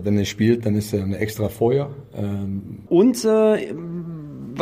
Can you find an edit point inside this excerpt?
yes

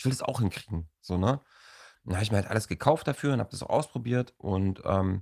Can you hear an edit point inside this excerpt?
no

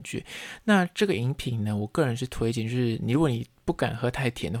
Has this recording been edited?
no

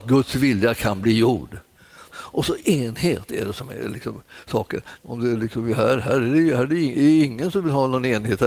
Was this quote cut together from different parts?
yes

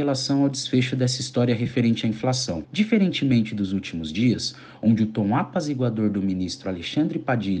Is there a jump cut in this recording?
yes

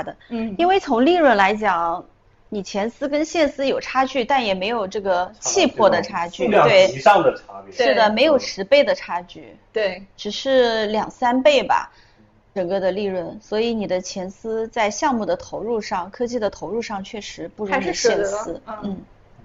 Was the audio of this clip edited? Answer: no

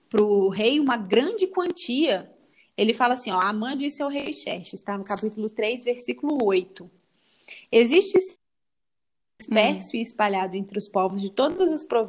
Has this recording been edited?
no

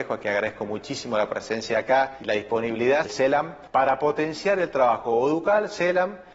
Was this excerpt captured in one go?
no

